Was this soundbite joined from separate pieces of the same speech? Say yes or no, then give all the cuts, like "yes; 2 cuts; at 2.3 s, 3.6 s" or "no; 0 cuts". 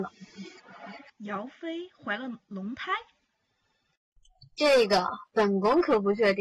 no; 0 cuts